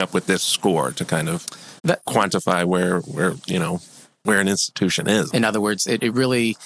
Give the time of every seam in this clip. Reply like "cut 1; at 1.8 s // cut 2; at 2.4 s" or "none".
cut 1; at 1.8 s // cut 2; at 5.3 s

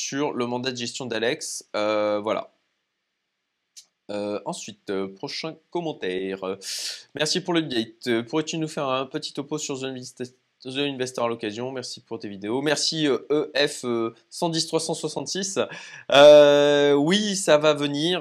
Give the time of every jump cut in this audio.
none

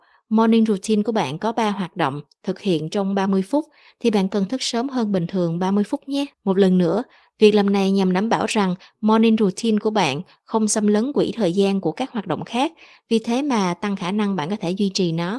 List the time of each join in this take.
cut 1; at 6.3 s

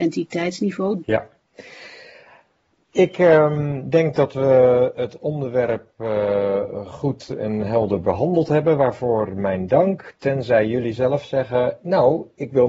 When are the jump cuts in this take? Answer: cut 1; at 1.0 s

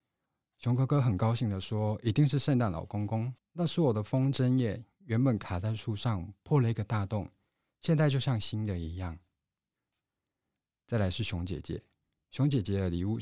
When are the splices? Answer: cut 1; at 3.4 s

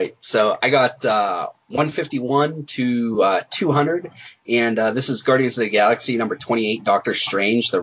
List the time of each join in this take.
none

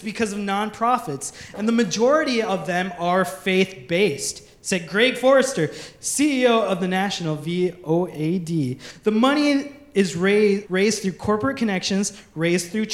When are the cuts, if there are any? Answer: cut 1; at 10.6 s

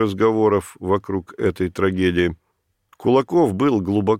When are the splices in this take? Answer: cut 1; at 2.9 s

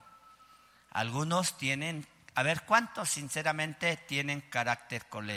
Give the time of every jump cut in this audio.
none

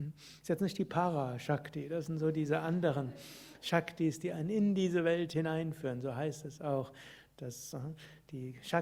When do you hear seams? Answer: none

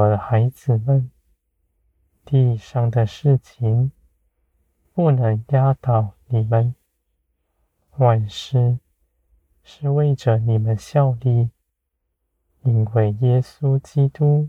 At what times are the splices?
none

